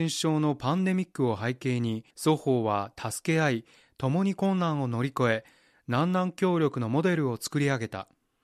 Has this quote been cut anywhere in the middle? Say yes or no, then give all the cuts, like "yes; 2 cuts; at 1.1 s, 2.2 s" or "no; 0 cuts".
yes; 1 cut; at 2.1 s